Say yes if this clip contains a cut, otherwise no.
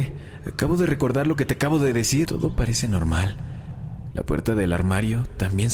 yes